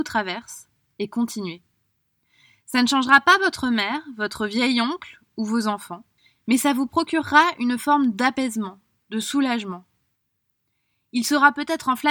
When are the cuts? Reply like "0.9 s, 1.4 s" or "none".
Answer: none

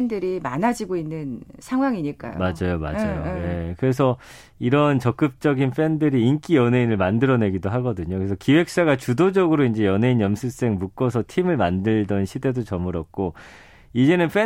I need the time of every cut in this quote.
none

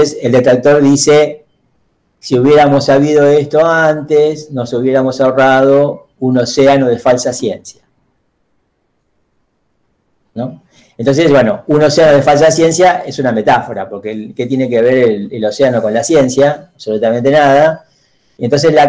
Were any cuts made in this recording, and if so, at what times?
none

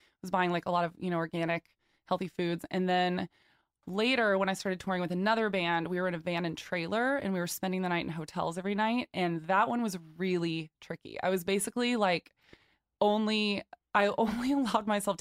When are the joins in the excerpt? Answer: none

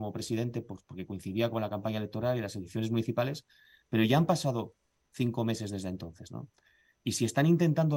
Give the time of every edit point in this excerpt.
none

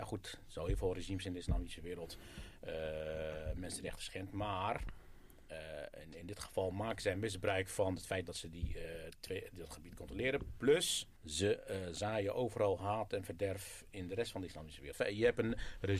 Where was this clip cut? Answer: 11.2 s, 14.9 s

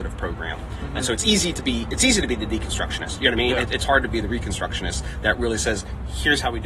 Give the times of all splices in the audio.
none

